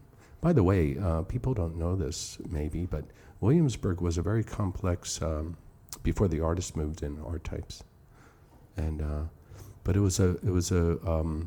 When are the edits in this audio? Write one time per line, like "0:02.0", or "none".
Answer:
none

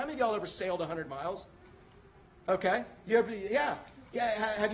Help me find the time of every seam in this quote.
none

